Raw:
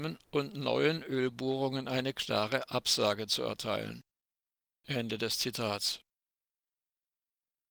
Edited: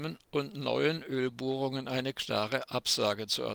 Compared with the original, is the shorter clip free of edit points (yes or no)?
yes